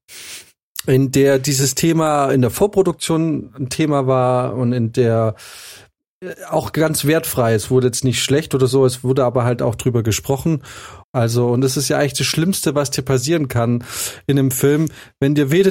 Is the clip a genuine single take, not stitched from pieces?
no; 1 cut; at 11.0 s

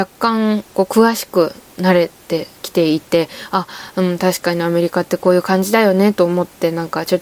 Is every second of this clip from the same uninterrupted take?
yes; 0 cuts

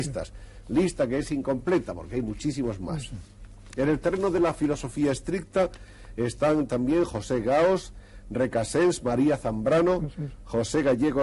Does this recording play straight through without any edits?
yes; 0 cuts

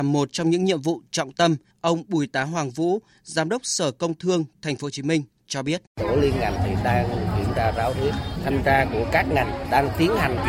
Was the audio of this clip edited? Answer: yes; 2 cuts; at 1.7 s, 5.9 s

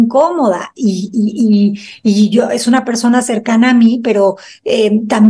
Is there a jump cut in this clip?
no; 0 cuts

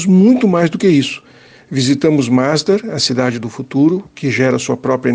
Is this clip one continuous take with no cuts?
yes; 0 cuts

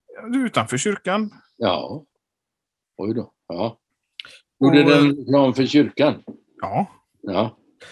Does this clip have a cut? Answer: no; 0 cuts

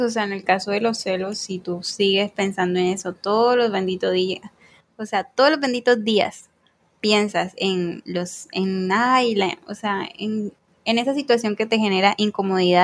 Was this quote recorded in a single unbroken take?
yes; 0 cuts

